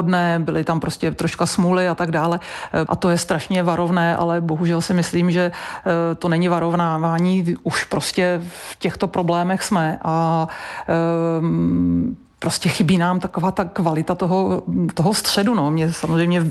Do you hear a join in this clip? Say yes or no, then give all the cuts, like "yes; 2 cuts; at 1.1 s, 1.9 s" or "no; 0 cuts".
yes; 1 cut; at 2.9 s